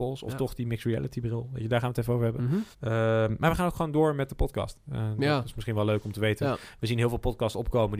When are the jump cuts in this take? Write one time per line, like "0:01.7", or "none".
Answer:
0:02.7